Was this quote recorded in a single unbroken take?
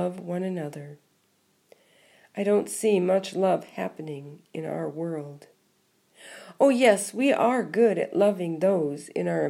yes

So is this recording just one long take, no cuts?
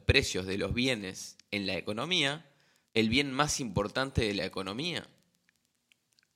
no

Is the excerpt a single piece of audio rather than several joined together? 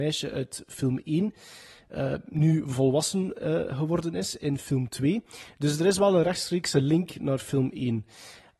yes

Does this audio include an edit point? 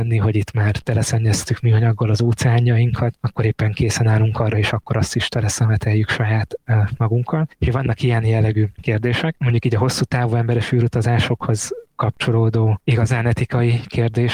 yes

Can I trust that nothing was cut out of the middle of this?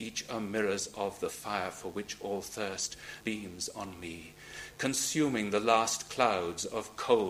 no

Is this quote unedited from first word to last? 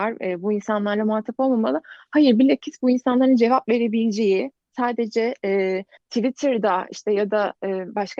no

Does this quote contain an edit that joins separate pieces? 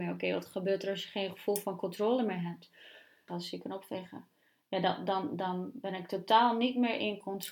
yes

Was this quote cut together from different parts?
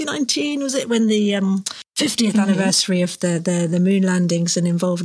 no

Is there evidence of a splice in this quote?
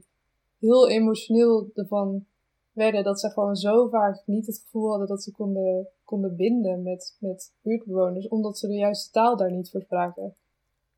no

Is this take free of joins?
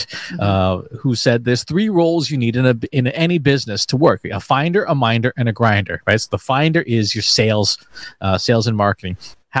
yes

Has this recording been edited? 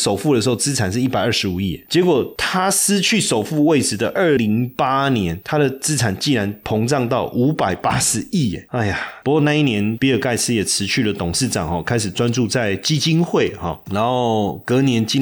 yes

